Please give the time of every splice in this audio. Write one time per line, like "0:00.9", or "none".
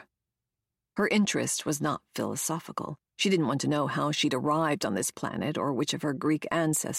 0:03.1

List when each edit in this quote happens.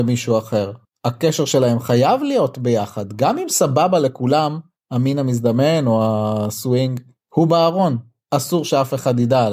none

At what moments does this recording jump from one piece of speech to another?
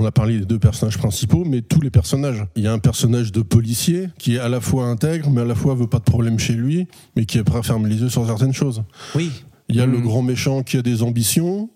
none

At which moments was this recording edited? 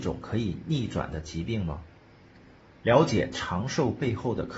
none

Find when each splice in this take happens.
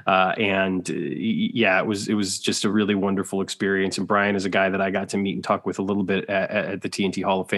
none

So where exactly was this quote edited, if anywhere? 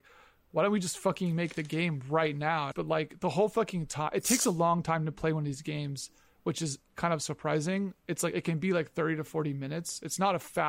0:02.7

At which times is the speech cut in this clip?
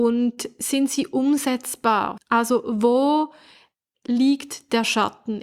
0:02.2

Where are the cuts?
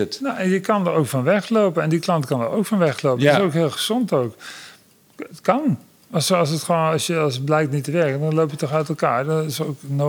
none

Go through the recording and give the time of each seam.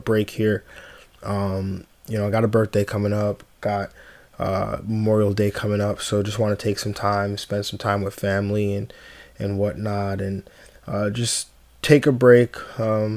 none

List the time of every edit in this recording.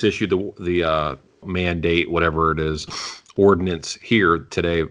0:01.4

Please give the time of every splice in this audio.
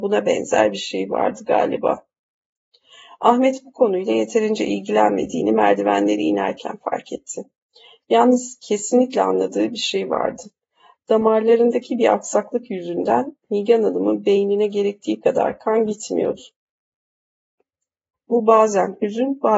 0:18.1

